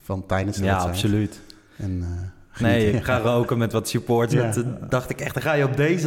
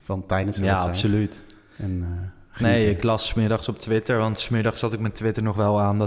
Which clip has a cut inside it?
first; 2 cuts; at 2.9 s, 4.3 s

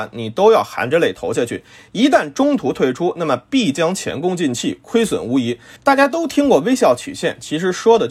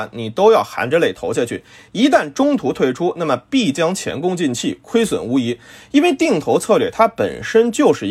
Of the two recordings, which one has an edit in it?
first; 1 cut; at 5.8 s

